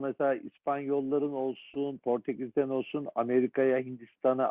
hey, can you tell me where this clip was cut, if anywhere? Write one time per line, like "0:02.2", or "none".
none